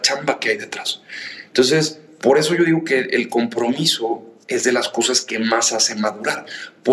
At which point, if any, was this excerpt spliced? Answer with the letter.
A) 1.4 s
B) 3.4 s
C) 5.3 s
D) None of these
D